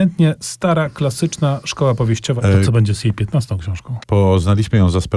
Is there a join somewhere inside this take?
yes; 2 cuts; at 2.4 s, 4.0 s

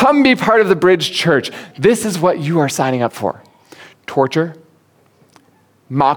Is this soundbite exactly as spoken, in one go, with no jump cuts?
yes; 0 cuts

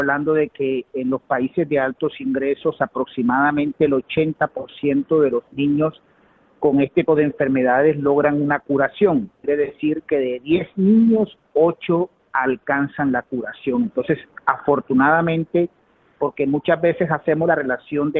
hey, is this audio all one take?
no; 1 cut; at 7.1 s

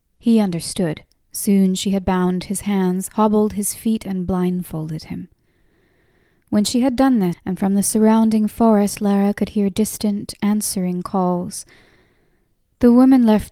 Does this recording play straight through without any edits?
no; 2 cuts; at 1.2 s, 7.3 s

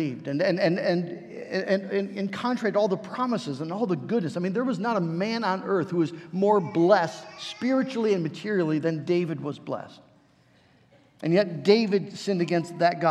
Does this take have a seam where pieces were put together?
no; 0 cuts

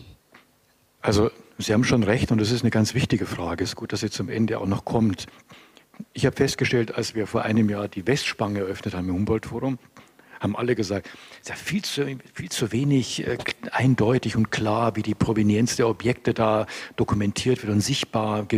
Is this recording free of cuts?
yes; 0 cuts

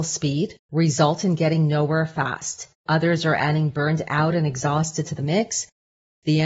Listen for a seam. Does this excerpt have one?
yes; 1 cut; at 2.9 s

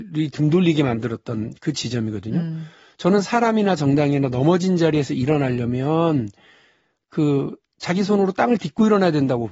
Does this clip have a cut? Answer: no; 0 cuts

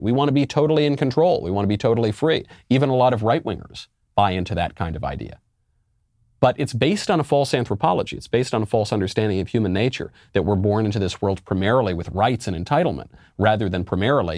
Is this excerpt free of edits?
yes; 0 cuts

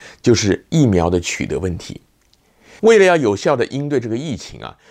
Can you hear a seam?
no; 0 cuts

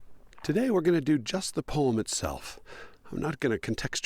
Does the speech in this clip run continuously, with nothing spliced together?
yes; 0 cuts

